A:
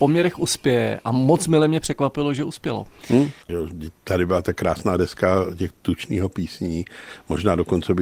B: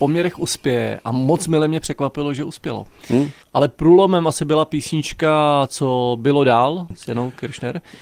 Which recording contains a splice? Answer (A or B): A